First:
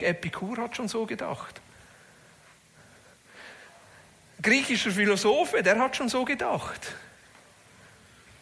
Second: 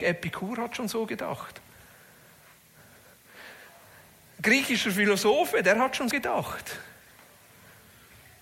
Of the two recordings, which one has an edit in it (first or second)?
second